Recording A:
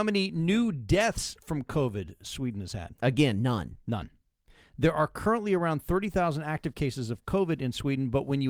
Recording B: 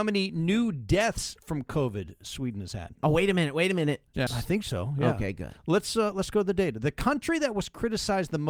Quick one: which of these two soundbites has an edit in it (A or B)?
B